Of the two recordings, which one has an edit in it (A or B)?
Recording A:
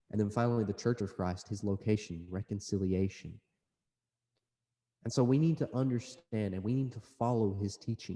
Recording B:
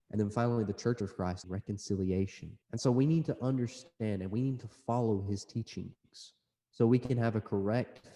B